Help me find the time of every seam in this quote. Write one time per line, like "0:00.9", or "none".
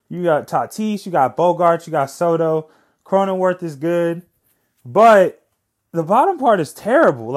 none